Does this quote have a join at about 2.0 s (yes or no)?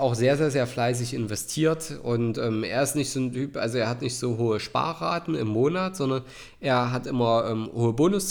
no